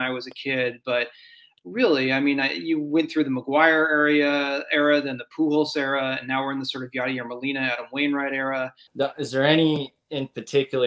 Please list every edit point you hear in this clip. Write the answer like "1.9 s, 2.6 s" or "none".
8.9 s

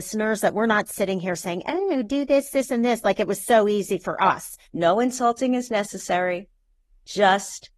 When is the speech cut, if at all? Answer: 4.7 s

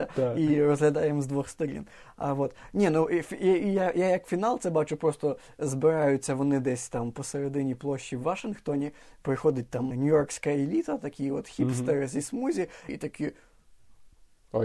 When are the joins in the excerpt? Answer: 9.9 s, 12.9 s

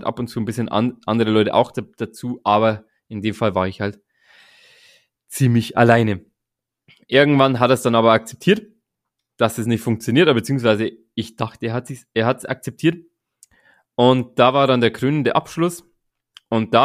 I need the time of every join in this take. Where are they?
none

